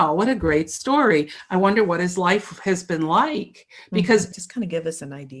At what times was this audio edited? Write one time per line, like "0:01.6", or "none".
0:04.3